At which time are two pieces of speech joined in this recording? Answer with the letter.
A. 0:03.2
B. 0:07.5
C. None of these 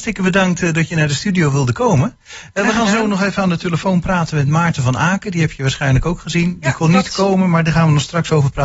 C